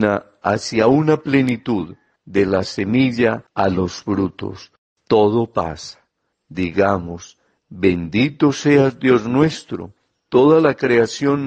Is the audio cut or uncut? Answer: cut